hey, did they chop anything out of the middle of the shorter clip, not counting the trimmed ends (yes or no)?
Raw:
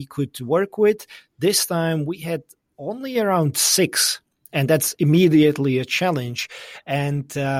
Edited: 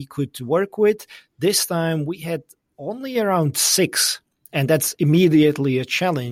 no